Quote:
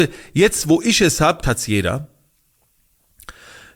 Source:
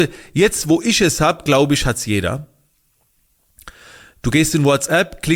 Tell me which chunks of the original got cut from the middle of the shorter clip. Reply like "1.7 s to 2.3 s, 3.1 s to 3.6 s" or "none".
1.4 s to 1.8 s